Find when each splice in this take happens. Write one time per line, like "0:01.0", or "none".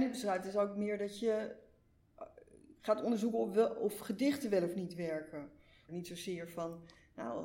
0:05.9